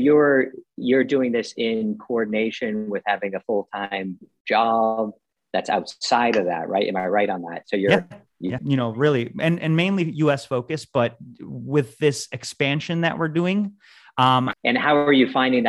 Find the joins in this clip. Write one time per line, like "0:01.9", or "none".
0:08.6
0:14.5